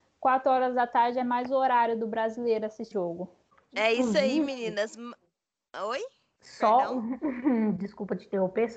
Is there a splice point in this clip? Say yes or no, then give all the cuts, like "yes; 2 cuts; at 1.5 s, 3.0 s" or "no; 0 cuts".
yes; 1 cut; at 2.9 s